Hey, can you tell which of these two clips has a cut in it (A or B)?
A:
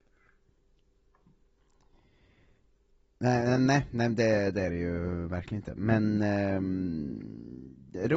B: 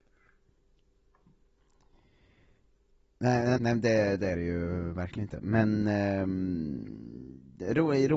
B